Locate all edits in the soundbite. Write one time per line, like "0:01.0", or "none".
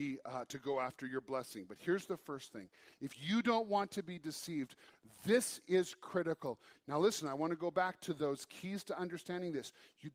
0:06.8

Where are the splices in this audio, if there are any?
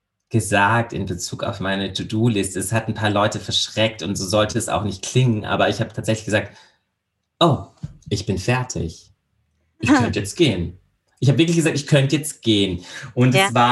none

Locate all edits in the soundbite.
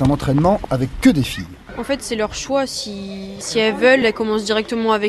0:04.0

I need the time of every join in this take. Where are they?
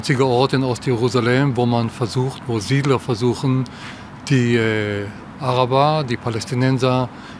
none

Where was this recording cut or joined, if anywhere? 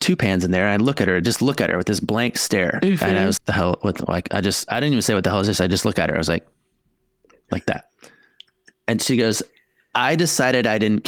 0:03.4

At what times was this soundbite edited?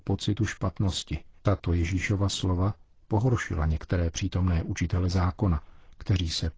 0:01.3

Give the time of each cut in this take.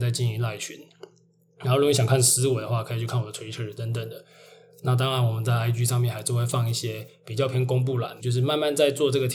0:08.2

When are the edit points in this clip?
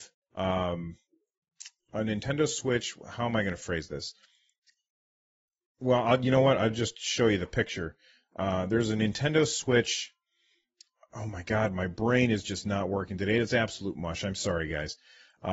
none

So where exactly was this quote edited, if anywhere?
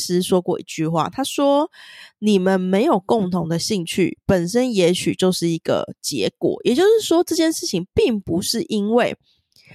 none

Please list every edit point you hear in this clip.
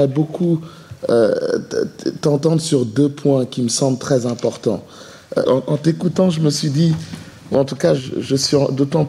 0:05.4
0:08.0

